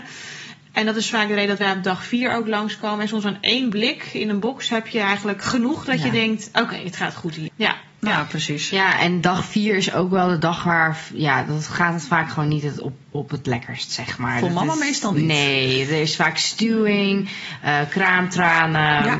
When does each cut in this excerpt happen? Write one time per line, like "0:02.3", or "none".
0:07.5